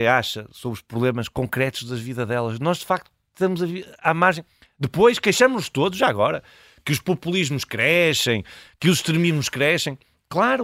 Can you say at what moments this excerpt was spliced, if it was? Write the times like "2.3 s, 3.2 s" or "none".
none